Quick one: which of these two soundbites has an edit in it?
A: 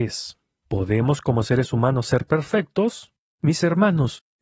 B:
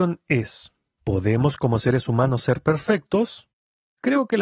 A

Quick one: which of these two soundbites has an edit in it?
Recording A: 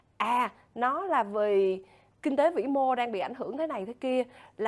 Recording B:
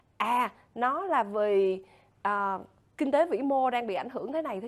A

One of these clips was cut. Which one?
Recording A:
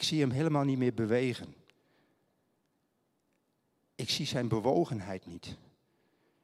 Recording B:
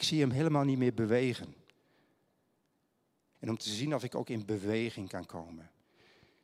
B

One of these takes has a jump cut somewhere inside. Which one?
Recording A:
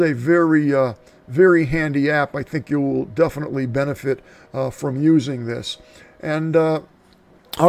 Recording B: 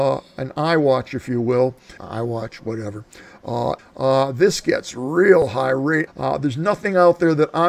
B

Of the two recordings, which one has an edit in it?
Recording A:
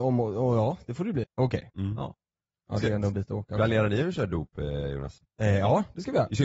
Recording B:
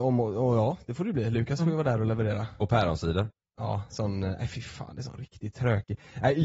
A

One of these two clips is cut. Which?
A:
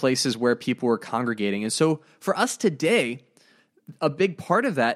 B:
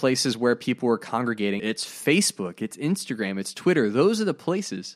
B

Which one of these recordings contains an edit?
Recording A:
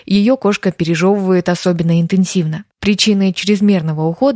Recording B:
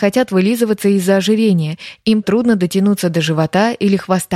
B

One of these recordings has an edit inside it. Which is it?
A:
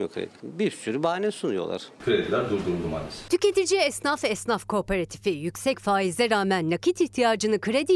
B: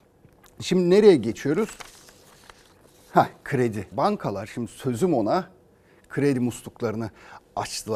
B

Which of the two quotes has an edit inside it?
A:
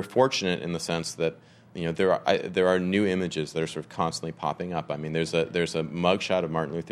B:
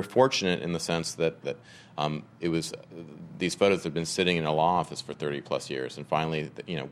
B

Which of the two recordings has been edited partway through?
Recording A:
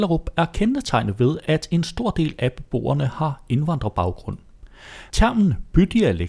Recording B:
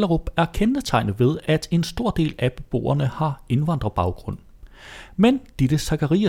A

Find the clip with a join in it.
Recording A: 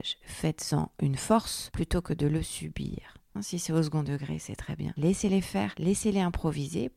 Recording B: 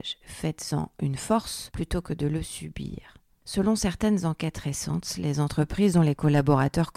A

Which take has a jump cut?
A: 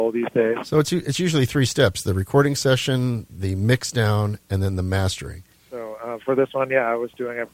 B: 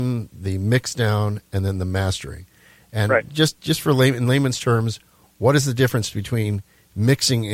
A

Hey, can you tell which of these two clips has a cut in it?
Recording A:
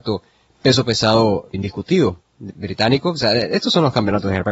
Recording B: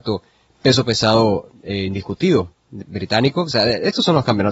A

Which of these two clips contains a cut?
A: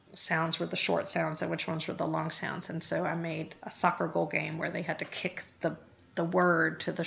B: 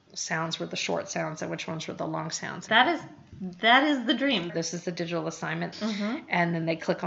B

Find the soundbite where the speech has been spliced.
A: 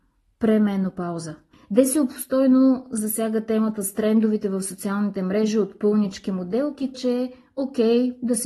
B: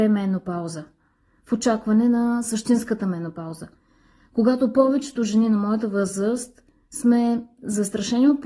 A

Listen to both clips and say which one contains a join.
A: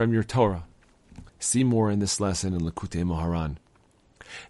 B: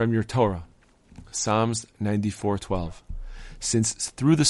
A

